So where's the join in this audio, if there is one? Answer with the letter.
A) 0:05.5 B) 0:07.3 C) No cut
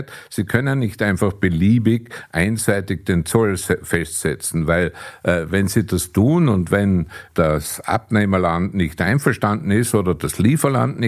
B